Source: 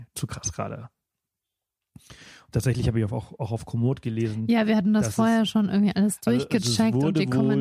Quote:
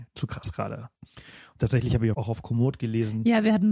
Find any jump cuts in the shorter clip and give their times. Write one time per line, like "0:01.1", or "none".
0:00.9
0:02.1

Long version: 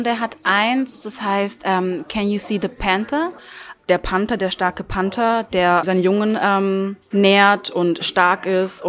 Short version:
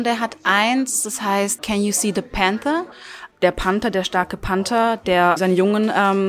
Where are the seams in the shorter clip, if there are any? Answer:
0:01.6

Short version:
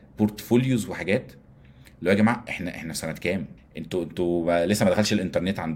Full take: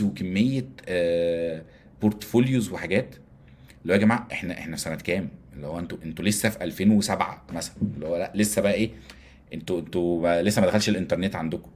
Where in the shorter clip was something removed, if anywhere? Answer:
0:03.6

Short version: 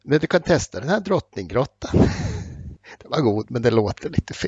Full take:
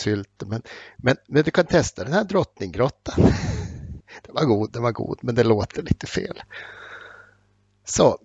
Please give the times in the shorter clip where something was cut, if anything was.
0:03.5

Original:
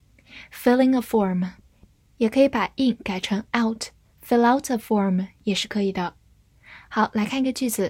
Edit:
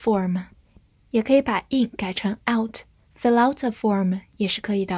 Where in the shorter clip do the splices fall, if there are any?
none

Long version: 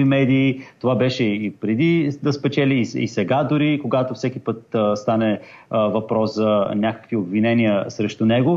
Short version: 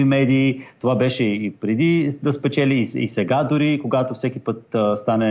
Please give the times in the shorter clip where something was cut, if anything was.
none

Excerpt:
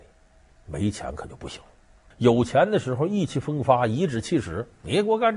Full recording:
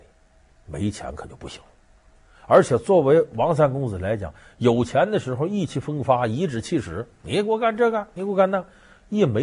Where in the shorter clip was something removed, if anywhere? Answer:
0:02.1

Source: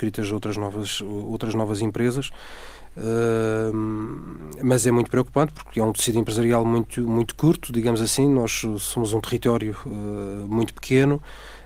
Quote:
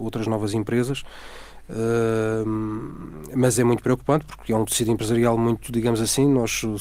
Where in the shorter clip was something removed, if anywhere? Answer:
0:05.7

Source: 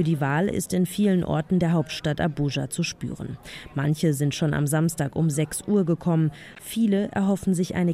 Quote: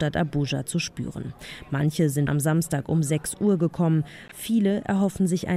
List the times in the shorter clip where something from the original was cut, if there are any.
0:02.3

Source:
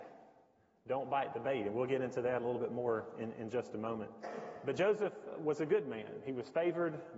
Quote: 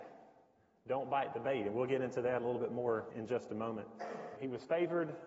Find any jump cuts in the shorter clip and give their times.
0:03.1
0:04.4

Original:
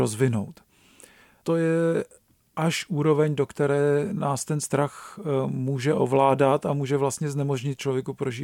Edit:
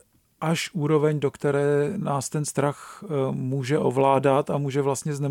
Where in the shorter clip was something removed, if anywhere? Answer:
none

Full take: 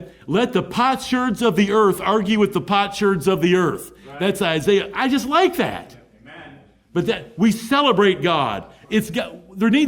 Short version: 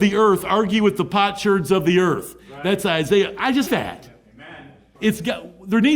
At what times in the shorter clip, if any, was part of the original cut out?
0:03.7
0:04.9

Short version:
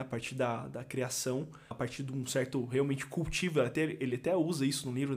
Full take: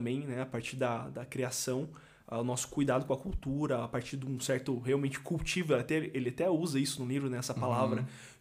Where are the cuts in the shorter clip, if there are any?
0:01.7

